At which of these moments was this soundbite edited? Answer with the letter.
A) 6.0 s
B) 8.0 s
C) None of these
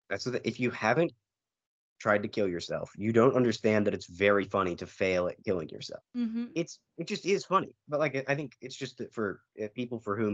A